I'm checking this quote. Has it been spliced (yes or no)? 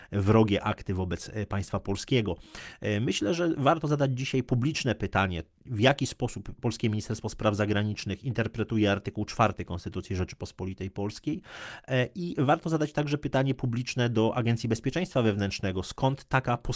no